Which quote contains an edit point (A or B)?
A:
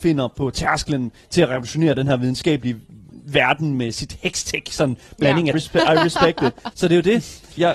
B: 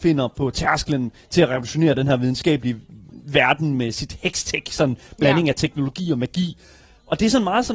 A